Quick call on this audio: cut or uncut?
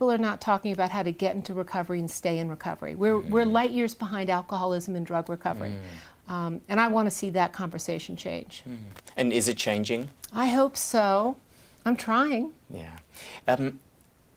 uncut